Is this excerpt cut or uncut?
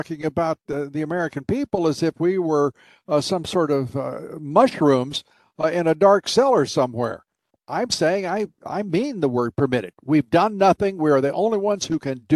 cut